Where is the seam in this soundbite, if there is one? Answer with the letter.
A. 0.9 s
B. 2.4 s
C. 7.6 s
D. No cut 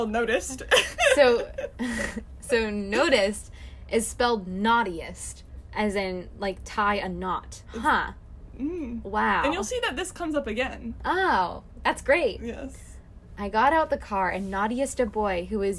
C